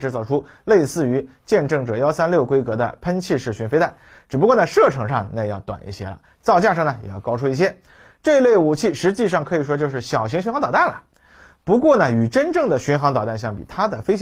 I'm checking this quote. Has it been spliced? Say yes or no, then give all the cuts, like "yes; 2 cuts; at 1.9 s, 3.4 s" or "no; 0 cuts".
no; 0 cuts